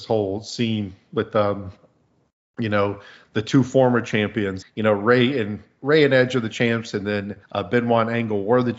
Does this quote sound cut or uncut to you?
cut